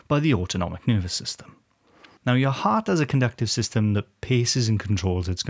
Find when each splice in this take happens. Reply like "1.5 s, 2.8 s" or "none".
2.2 s